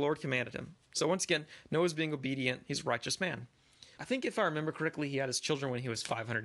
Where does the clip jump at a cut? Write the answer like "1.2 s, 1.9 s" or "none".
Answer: 4.0 s